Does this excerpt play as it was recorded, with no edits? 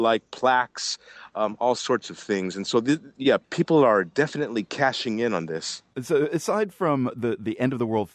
yes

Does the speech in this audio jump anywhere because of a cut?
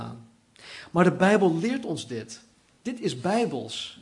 no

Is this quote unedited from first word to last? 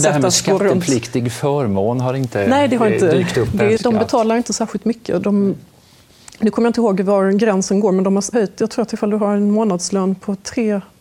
no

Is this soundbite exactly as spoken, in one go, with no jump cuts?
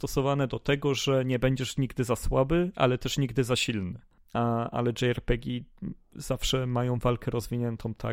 no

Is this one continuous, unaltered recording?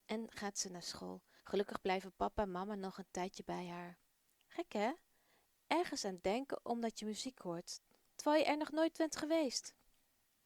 no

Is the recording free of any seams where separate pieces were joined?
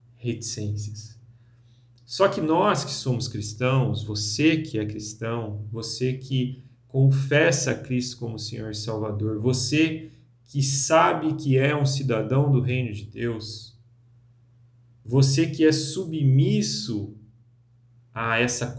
yes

